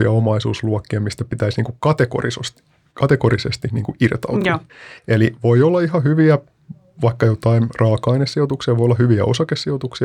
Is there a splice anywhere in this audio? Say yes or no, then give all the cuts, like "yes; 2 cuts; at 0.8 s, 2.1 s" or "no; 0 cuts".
no; 0 cuts